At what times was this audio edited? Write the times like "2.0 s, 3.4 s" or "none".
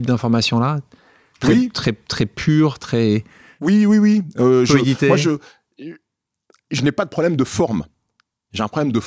none